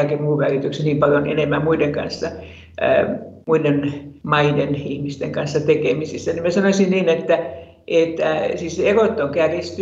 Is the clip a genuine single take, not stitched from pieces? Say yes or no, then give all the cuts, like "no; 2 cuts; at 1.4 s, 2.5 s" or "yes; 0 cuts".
yes; 0 cuts